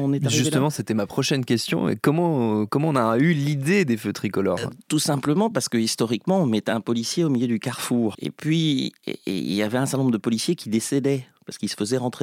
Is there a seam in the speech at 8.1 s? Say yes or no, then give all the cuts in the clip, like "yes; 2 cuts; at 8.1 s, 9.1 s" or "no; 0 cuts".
yes; 1 cut; at 8.1 s